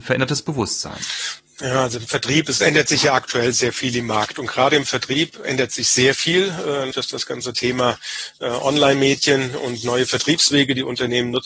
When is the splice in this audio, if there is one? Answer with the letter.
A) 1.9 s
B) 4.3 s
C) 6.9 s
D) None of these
C